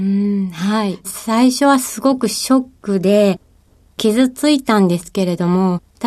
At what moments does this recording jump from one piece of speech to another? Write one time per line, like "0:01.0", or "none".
0:01.0